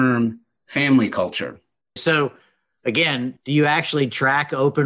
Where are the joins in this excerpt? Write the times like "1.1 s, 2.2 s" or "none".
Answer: 2.0 s, 3.4 s